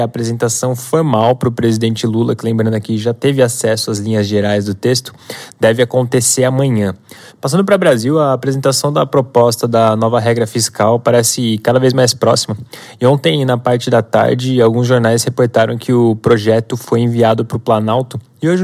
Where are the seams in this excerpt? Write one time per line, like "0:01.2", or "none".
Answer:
0:07.3